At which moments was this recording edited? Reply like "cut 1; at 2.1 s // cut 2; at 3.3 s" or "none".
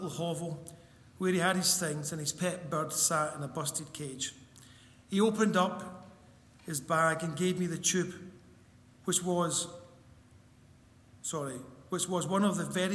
none

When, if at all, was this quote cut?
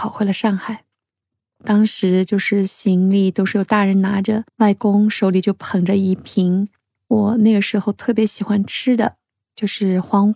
cut 1; at 1.6 s // cut 2; at 4.5 s

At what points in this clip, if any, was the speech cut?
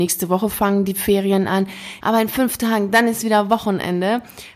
cut 1; at 2.0 s

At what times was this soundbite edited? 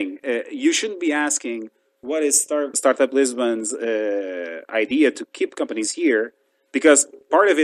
cut 1; at 2.7 s

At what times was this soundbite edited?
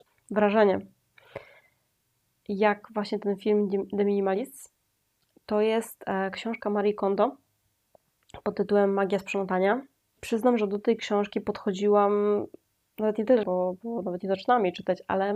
cut 1; at 13.4 s

